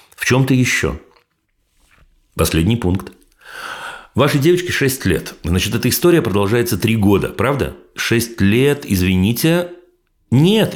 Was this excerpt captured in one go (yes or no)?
yes